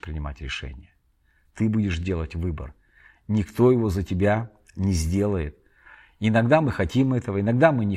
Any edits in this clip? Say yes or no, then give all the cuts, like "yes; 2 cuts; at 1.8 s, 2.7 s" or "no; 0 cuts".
no; 0 cuts